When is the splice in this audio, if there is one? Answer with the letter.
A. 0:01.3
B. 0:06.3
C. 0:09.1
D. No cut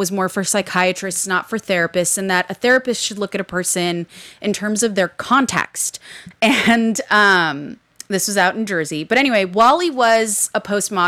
B